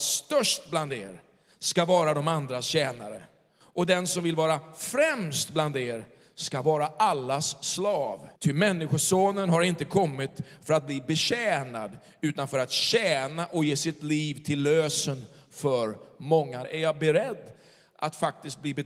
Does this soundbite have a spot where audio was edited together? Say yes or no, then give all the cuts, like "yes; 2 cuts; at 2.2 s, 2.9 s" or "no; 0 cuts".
yes; 2 cuts; at 8.4 s, 16.6 s